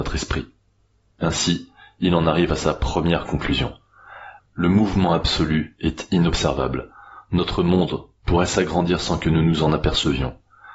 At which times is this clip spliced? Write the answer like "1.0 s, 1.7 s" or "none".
4.4 s